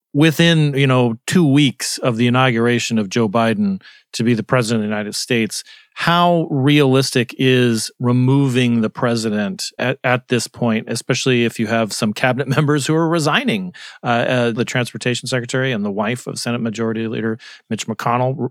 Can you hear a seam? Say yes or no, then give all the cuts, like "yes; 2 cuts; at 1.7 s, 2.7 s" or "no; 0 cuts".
yes; 2 cuts; at 9.8 s, 14.6 s